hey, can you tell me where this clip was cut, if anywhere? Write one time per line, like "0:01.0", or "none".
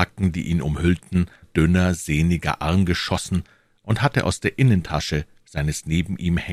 0:01.4